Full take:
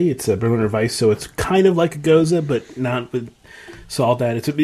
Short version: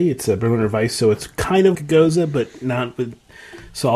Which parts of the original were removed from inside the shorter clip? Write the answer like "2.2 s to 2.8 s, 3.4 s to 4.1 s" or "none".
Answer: 1.7 s to 1.9 s